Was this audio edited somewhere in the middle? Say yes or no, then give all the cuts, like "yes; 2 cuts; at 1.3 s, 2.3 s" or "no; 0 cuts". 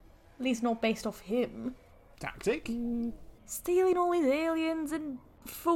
yes; 2 cuts; at 2.1 s, 3.4 s